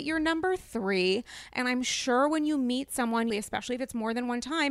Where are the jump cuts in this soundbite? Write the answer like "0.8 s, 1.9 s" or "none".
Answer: 3.3 s